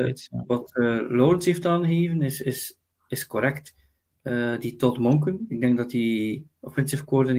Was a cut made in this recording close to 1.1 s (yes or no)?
no